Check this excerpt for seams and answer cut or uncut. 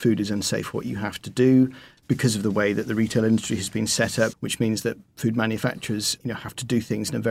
cut